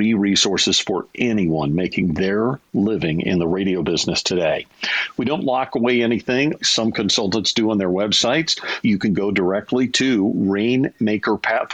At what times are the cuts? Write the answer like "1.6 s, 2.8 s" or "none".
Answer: 6.6 s, 8.8 s